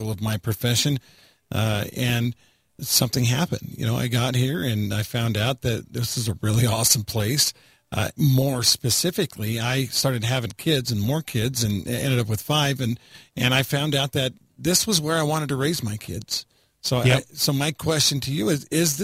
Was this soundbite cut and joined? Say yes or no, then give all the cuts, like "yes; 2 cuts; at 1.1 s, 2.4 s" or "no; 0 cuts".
no; 0 cuts